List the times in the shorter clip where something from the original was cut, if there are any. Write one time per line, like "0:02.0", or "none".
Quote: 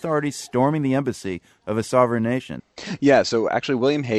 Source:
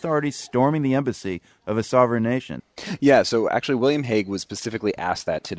none

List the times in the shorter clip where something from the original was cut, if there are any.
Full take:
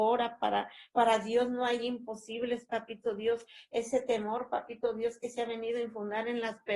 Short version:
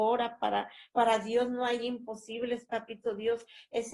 none

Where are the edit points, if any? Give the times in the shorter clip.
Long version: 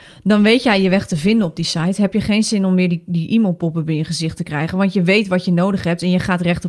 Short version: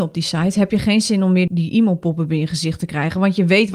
0:01.5

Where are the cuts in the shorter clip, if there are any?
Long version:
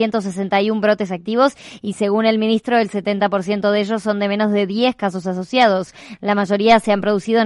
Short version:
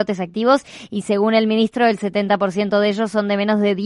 none

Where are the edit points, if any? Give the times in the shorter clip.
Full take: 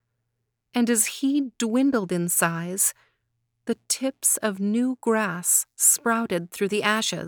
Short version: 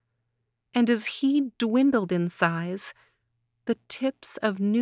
none

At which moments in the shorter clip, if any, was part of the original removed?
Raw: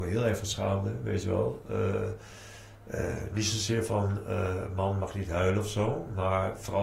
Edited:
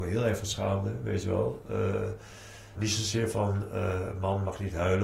0:02.7

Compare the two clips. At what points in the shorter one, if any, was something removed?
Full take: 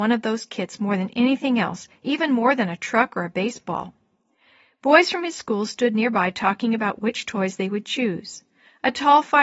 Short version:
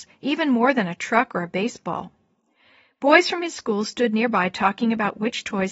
none

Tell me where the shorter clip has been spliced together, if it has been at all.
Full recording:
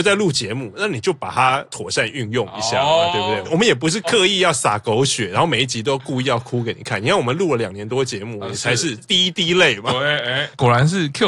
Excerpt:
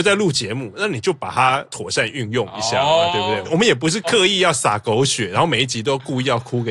none

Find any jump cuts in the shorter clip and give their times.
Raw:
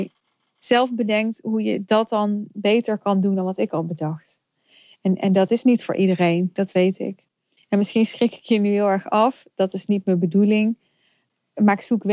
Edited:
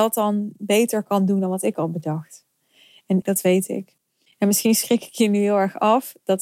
0:03.2

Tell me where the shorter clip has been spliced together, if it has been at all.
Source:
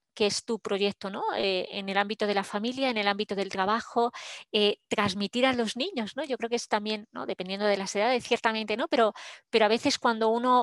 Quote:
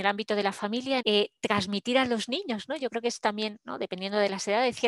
0:01.0

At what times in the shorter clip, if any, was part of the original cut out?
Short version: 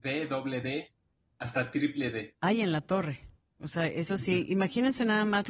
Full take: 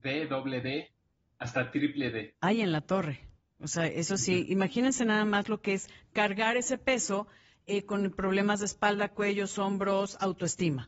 none

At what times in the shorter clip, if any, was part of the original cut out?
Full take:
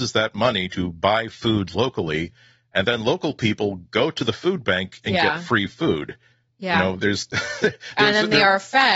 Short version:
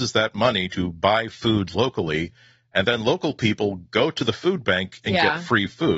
none

